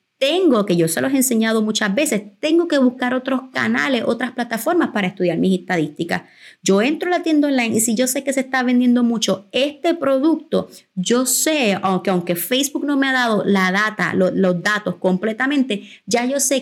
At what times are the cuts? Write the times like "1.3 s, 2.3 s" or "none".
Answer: none